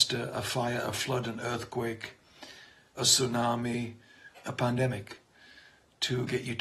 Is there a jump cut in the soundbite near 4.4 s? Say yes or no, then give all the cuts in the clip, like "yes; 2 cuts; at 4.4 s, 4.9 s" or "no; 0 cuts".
yes; 2 cuts; at 3.0 s, 4.4 s